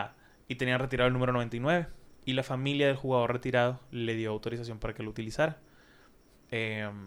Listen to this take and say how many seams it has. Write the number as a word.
zero